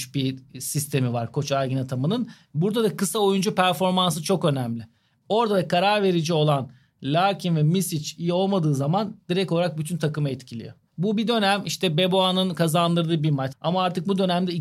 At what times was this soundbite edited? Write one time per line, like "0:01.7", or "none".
0:13.5